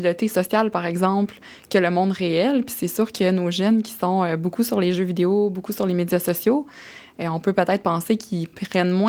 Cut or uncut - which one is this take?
uncut